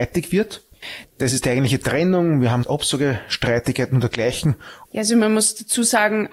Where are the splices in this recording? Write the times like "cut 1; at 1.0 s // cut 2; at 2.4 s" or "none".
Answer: cut 1; at 1.0 s // cut 2; at 2.6 s // cut 3; at 4.8 s